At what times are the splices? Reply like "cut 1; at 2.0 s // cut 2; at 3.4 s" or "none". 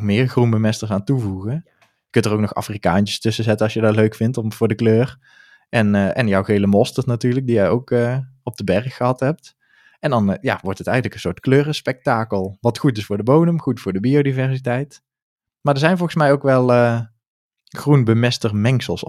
none